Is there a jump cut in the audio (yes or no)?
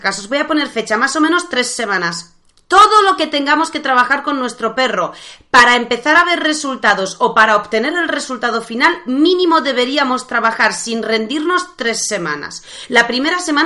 no